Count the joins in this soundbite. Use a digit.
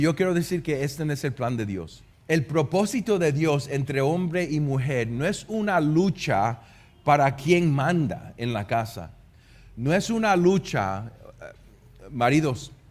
1